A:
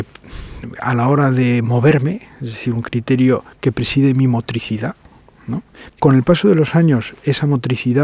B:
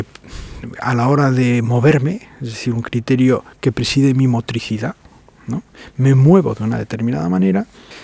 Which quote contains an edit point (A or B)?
A